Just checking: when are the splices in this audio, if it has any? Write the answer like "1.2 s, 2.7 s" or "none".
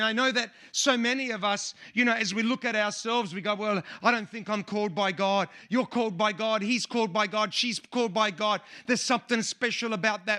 none